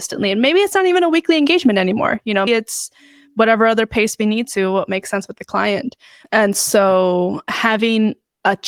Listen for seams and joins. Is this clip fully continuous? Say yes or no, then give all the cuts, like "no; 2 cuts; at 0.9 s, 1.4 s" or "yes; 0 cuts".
no; 2 cuts; at 2.5 s, 6.2 s